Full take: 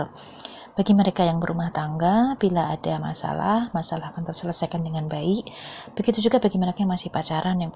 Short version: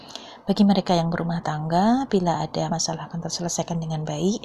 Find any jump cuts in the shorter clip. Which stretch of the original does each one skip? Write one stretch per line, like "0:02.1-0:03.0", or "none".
0:03.0-0:03.7

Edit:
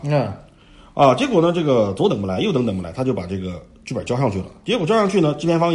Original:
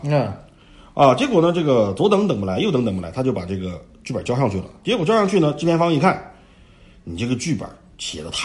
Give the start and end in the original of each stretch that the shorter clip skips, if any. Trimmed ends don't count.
0:02.1-0:02.3

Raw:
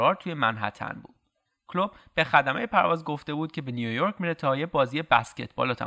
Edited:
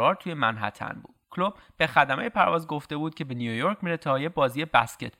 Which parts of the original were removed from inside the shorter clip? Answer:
0:01.2-0:01.6

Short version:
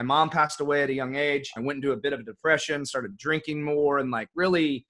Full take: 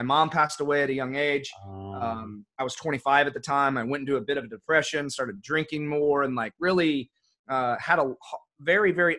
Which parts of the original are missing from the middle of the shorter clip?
0:01.6-0:03.8

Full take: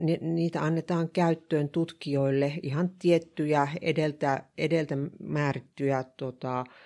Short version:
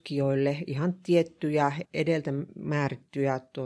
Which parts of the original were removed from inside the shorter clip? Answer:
0:03.8-0:04.5

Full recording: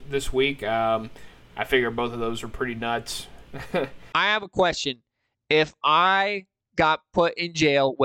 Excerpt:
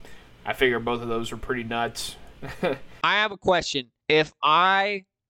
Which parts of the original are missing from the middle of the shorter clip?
0:05.1-0:05.4

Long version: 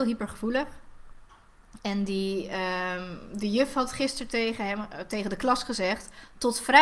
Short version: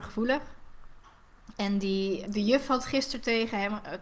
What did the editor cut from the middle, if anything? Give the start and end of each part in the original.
0:02.5-0:03.3

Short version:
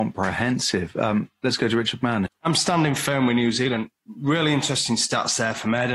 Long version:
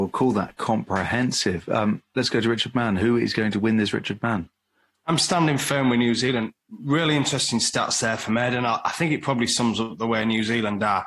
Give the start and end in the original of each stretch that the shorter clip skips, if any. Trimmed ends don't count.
0:03.0-0:04.9

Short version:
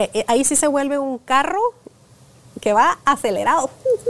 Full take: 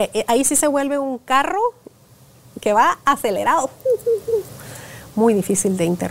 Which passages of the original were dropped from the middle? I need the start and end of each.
none

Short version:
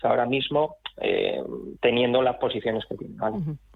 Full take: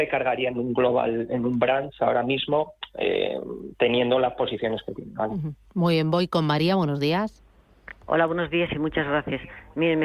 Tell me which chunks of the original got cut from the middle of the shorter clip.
none

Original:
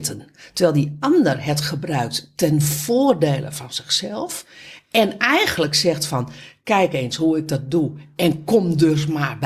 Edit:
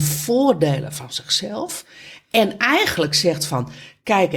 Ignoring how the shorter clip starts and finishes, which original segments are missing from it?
none

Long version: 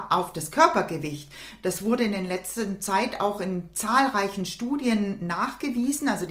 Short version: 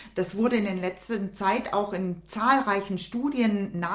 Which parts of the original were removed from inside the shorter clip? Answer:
none

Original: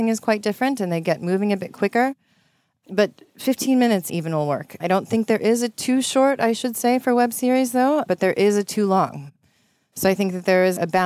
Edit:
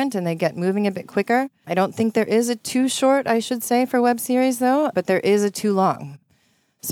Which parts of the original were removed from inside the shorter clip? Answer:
0:02.3-0:04.8

